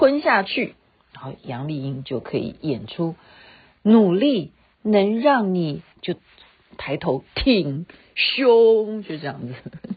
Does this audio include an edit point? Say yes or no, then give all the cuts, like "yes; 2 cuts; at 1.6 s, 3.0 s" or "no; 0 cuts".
yes; 1 cut; at 5.9 s